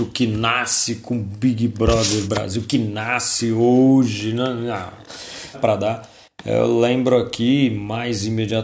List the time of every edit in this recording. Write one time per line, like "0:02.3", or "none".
0:05.5